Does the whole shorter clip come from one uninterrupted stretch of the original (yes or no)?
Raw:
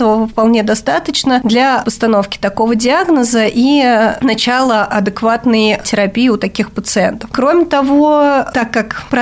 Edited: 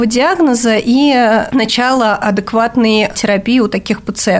yes